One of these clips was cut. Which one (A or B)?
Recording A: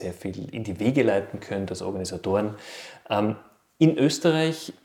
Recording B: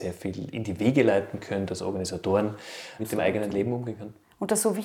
B